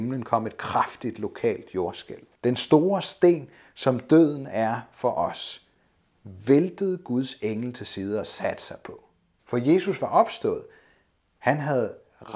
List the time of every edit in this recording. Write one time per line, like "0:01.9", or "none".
0:02.4
0:09.4